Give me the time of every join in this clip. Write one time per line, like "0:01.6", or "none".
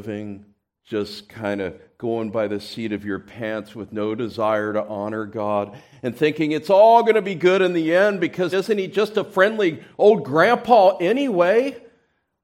0:08.5